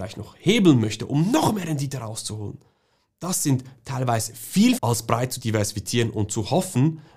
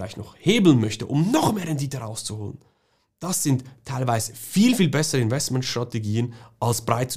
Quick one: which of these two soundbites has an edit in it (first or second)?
first